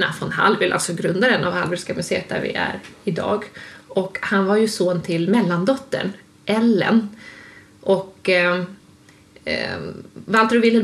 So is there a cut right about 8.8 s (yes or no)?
no